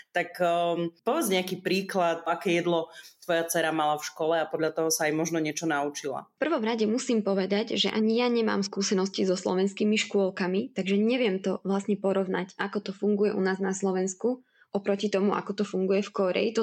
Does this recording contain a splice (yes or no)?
no